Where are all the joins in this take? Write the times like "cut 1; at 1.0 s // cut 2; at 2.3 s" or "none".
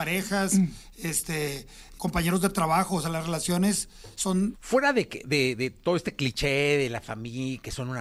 cut 1; at 2.0 s // cut 2; at 4.5 s